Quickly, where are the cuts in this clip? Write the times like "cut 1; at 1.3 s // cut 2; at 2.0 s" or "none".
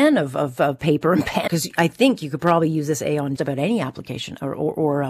cut 1; at 1.5 s // cut 2; at 3.4 s